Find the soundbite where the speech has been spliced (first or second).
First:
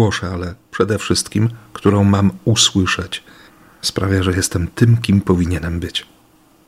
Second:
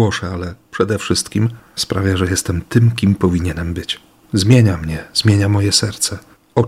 second